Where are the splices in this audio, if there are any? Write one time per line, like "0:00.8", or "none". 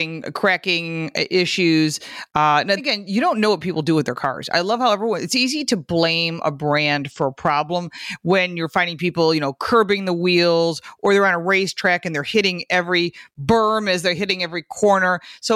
0:02.8